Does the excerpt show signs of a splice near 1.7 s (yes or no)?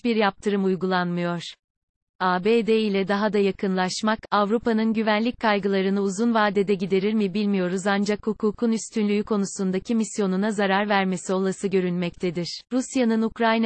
no